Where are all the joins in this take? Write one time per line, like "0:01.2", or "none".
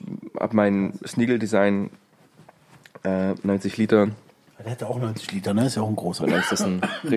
0:06.2